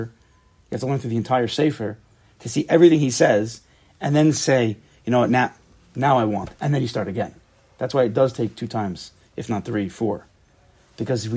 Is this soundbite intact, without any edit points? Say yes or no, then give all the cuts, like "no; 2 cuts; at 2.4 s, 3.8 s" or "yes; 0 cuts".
yes; 0 cuts